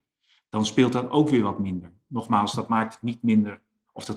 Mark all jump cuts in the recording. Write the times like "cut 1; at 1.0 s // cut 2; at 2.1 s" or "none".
none